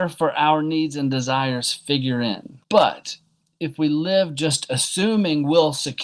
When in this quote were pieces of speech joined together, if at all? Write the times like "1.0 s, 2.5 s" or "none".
2.6 s

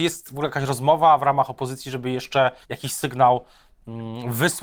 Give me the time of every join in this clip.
2.6 s

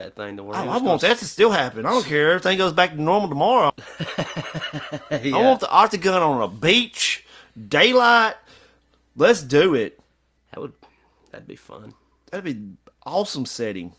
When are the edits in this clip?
3.7 s

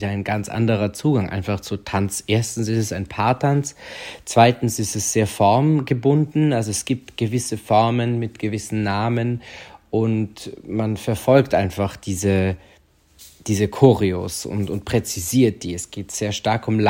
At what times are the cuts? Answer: none

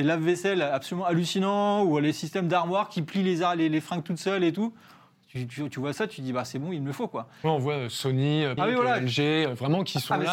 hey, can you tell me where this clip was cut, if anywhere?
8.6 s

